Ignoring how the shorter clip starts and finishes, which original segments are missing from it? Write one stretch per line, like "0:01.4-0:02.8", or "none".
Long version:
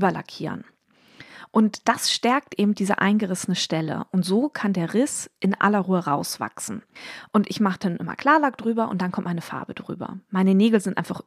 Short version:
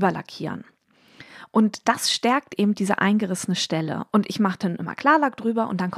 0:04.1-0:07.3